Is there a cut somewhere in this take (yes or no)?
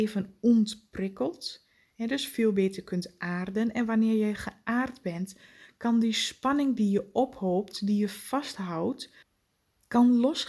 no